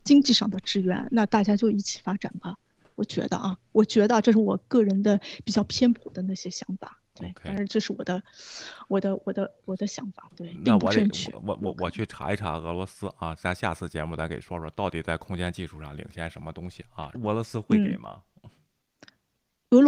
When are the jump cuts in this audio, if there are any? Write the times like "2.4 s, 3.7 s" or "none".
13.4 s, 17.1 s